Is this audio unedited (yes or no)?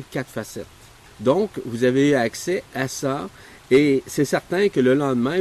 no